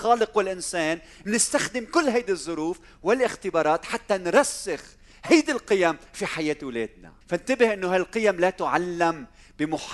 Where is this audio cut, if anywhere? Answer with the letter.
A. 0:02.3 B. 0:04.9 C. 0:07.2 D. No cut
C